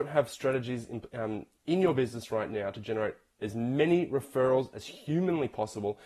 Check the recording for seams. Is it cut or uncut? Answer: uncut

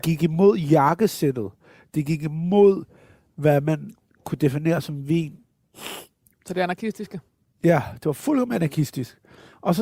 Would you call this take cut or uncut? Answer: uncut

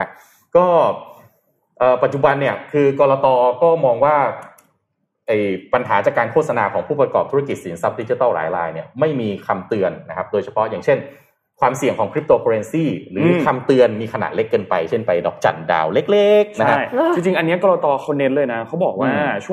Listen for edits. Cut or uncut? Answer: uncut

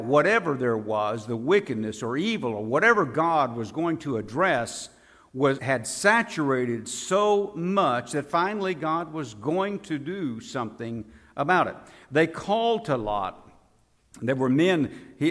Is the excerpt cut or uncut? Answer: cut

